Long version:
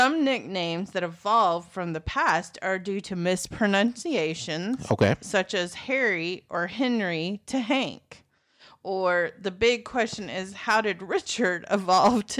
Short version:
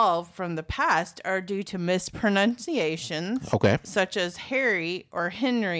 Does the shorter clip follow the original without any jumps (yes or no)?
yes